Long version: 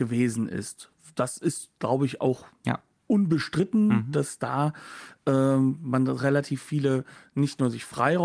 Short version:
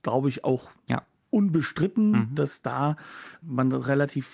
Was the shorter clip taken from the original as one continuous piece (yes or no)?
no